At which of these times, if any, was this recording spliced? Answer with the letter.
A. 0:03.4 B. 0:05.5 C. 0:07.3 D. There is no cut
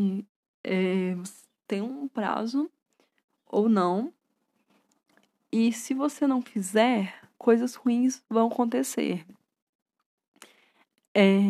C